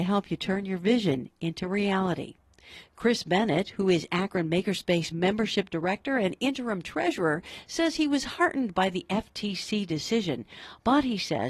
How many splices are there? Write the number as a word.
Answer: zero